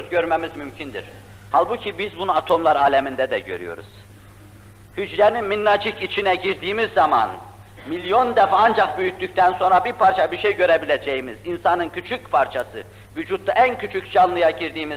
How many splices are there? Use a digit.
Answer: 1